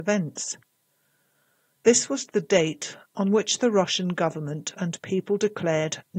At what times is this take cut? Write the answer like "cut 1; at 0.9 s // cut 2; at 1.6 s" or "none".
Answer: none